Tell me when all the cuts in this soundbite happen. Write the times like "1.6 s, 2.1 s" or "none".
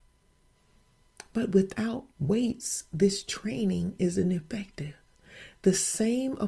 2.1 s